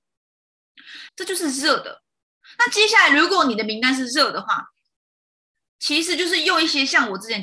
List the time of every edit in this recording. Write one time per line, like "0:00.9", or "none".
0:01.1

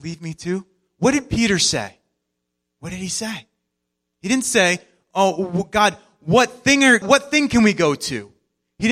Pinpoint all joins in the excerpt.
0:07.0

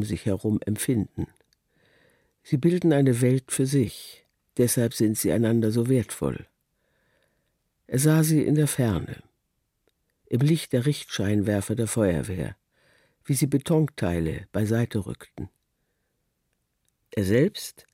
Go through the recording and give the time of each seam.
none

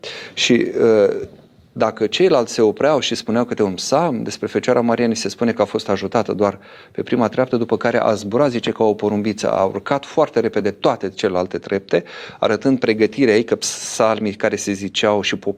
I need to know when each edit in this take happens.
none

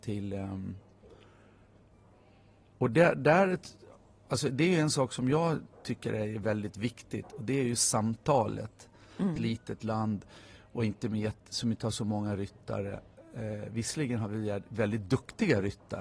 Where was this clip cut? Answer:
0:09.4

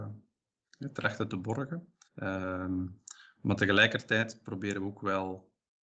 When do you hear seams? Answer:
0:02.0

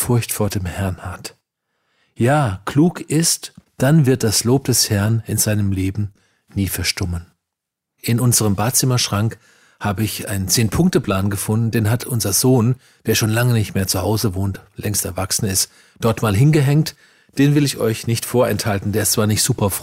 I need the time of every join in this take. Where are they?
0:03.7

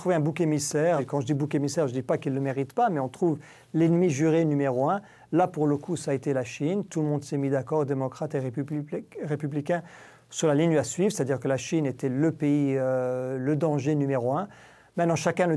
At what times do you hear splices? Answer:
0:01.0

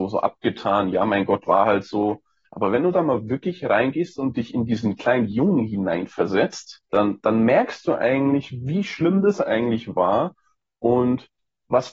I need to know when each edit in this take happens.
0:02.4
0:06.9

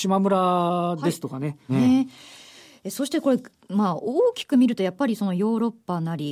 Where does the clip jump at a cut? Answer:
0:01.7

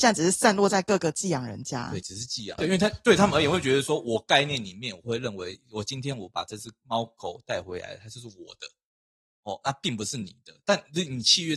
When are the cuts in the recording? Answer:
0:02.6

